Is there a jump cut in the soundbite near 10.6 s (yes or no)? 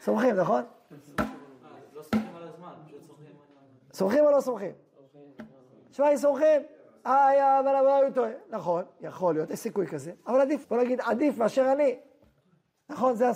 yes